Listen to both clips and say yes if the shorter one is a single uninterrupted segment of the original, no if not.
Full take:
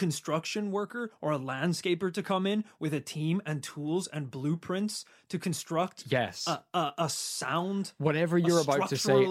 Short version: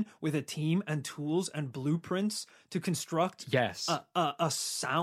yes